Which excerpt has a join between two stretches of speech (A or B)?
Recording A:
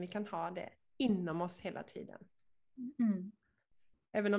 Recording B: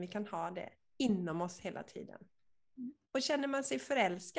B